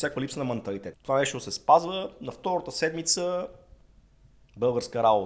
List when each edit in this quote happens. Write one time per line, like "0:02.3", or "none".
0:00.9